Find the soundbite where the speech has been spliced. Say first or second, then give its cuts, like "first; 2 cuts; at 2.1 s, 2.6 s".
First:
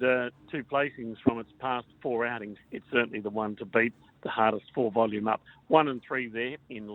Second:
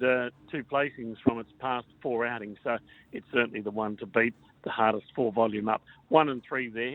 first; 1 cut; at 2.6 s